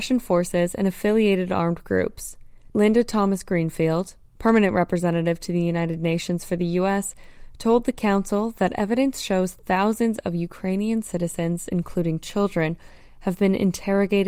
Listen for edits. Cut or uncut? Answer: uncut